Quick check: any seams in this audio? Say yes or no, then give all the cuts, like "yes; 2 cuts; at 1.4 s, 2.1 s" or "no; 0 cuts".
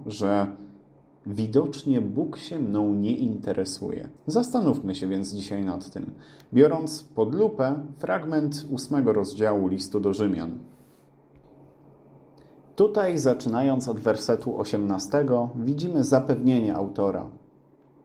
yes; 1 cut; at 4.2 s